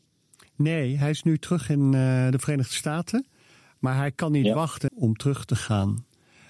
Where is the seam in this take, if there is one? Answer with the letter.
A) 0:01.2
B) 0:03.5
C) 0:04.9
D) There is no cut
C